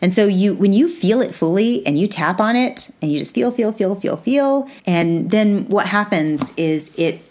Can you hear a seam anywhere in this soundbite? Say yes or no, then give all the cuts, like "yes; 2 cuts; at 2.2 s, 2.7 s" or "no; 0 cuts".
yes; 1 cut; at 4.8 s